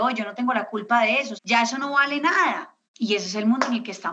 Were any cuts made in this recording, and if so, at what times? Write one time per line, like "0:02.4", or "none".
0:01.3
0:02.9